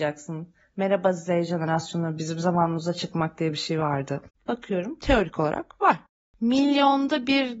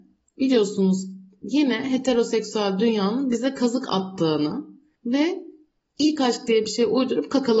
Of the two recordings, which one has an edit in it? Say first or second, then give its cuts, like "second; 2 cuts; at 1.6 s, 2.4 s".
first; 2 cuts; at 4.4 s, 6.3 s